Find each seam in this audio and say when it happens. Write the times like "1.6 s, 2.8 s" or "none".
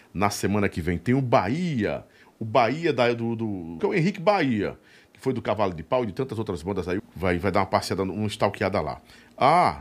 3.8 s, 7.0 s